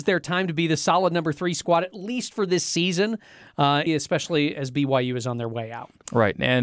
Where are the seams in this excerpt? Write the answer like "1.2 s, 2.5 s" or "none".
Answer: 3.9 s